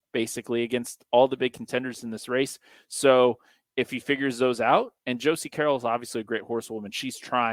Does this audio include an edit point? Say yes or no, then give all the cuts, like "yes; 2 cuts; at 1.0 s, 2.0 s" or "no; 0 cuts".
no; 0 cuts